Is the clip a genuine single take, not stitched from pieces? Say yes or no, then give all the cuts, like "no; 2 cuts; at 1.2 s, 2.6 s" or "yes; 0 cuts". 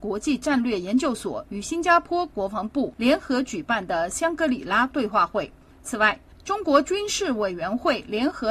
no; 1 cut; at 5.7 s